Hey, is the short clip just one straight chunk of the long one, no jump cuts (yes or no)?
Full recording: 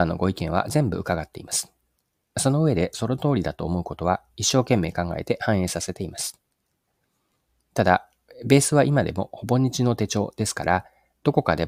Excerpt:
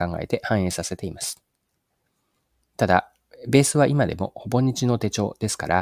yes